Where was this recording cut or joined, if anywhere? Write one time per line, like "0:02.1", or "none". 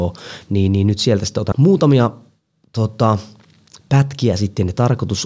0:01.5